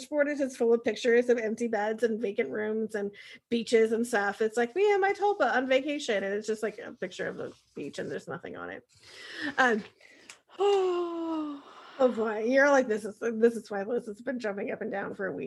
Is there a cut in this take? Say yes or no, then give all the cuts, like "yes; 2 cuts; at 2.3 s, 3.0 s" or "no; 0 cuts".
no; 0 cuts